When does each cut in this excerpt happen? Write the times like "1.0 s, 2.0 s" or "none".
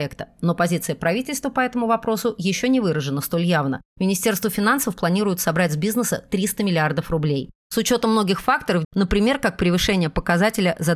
3.9 s, 7.6 s, 8.8 s